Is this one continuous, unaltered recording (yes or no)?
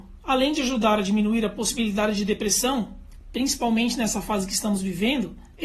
yes